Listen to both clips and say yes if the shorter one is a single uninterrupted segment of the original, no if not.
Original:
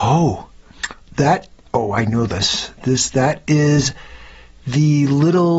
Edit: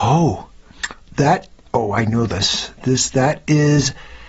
yes